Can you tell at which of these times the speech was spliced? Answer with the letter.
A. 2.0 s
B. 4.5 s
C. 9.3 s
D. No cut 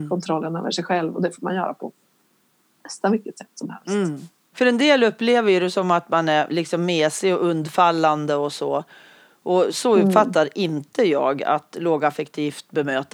B